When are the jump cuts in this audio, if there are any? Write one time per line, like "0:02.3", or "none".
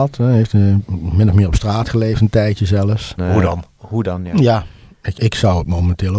0:03.2
0:05.1